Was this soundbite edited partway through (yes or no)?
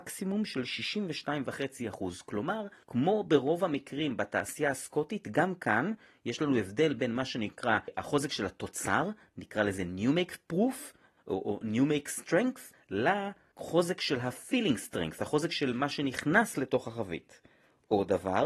no